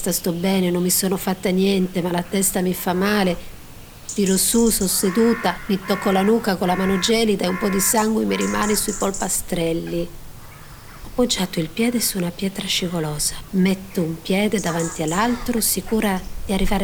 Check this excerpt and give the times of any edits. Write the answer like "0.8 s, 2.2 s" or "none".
13.5 s